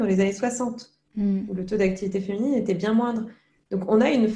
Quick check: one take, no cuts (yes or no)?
yes